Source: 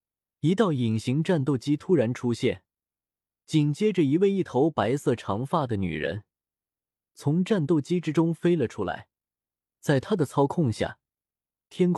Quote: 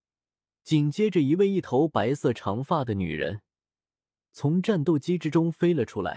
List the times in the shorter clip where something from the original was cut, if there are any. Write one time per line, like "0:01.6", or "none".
none